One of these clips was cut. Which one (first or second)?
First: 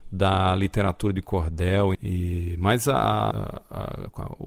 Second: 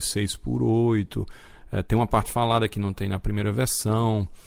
first